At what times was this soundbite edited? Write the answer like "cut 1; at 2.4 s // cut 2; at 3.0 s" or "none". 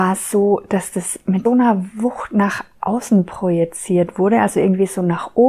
cut 1; at 1.4 s